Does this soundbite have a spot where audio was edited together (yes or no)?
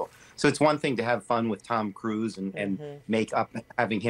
no